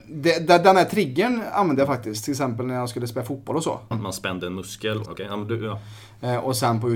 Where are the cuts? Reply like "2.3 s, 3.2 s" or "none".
3.9 s, 5.0 s